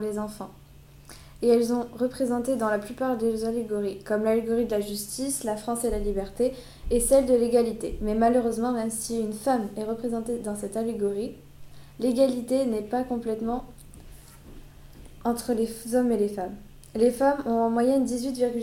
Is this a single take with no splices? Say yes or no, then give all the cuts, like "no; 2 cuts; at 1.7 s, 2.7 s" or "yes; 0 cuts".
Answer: yes; 0 cuts